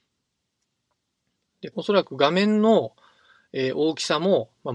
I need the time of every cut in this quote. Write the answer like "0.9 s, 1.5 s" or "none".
1.7 s